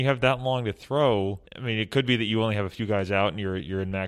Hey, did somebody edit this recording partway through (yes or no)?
yes